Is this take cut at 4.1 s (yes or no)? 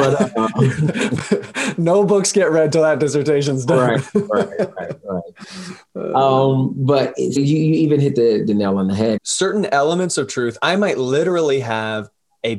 no